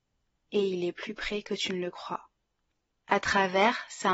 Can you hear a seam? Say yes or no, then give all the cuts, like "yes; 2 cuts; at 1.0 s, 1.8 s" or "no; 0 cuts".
yes; 1 cut; at 3.0 s